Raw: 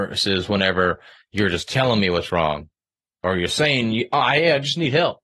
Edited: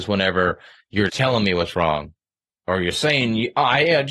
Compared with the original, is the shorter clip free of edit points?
no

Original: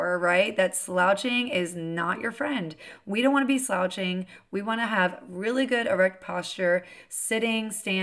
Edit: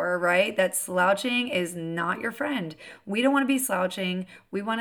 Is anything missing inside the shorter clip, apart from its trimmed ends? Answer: no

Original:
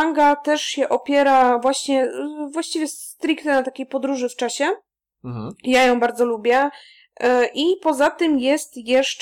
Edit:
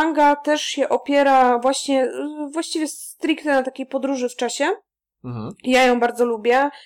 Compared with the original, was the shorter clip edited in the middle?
no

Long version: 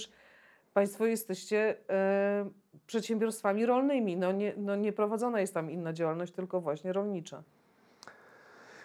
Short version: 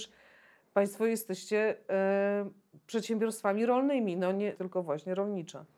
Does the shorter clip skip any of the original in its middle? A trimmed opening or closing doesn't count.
yes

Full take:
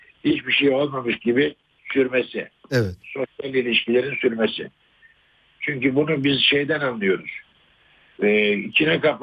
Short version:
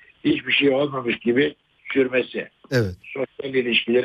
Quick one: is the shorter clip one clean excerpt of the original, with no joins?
yes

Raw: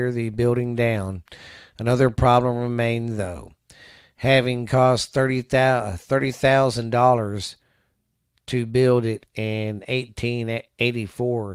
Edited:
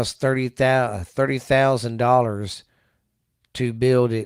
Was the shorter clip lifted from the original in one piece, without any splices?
yes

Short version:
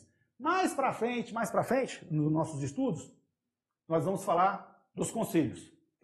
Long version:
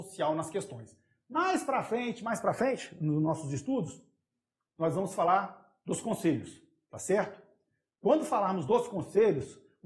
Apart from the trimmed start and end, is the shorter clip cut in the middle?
no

